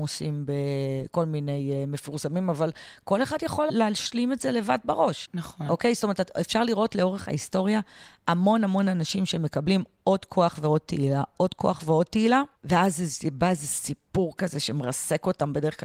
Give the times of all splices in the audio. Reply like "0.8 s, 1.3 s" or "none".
11.3 s